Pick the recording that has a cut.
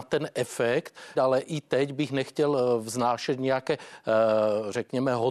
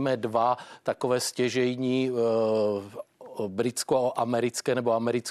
first; 1 cut; at 1.1 s

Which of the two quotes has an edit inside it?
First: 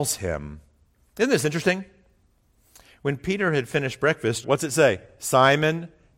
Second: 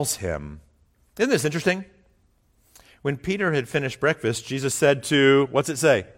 first; 1 cut; at 4.4 s

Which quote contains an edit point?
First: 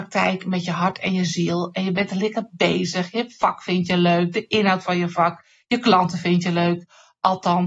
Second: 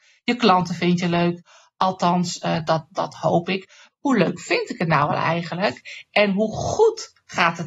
second; 1 cut; at 3.9 s

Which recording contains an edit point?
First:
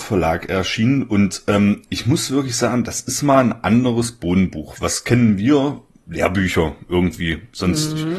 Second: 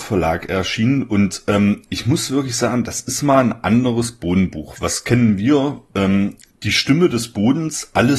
second; 1 cut; at 5.9 s

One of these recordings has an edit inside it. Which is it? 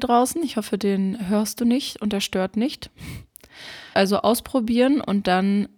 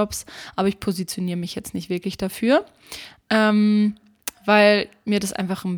first; 1 cut; at 3.9 s

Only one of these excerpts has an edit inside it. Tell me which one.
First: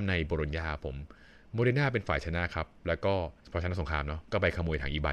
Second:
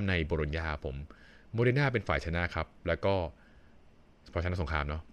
first; 1 cut; at 3.4 s

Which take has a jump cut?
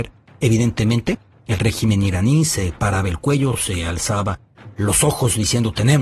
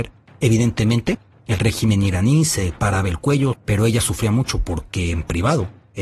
second; 1 cut; at 3.5 s

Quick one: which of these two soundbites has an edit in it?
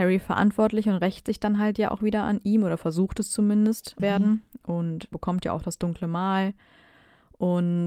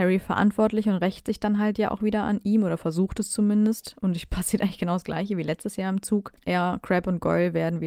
first; 2 cuts; at 4.0 s, 5.1 s

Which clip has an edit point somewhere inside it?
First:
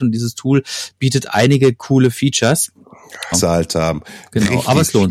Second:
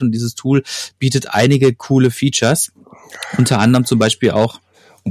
first; 1 cut; at 3.3 s

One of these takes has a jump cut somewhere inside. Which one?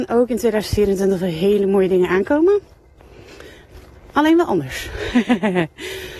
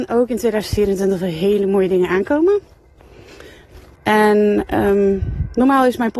second; 1 cut; at 3.9 s

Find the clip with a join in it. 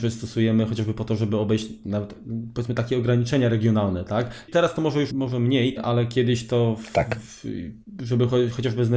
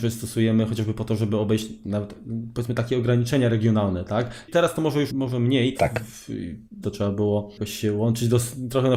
second; 2 cuts; at 5.7 s, 6.8 s

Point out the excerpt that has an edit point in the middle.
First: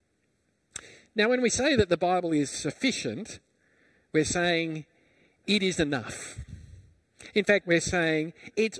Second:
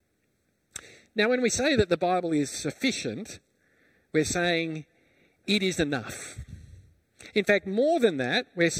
first; 1 cut; at 7.6 s

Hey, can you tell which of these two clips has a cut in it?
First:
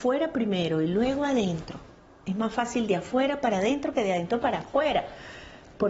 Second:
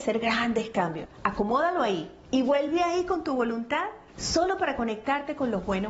second; 2 cuts; at 1.0 s, 4.1 s

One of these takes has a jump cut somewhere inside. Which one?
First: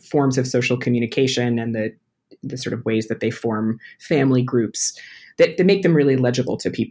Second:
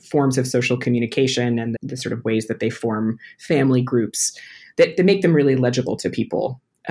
second; 1 cut; at 1.8 s

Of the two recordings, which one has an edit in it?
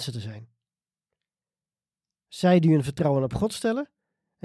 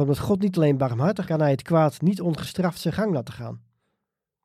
second; 1 cut; at 1.2 s

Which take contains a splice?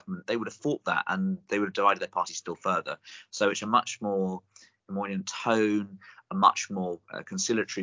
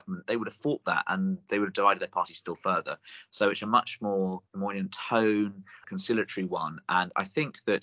second; 2 cuts; at 4.5 s, 5.8 s

